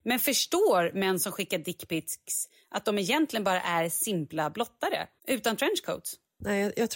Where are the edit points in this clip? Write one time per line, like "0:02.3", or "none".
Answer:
0:05.2